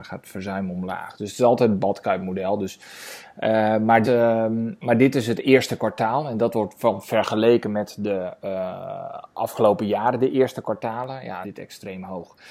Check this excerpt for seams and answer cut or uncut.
cut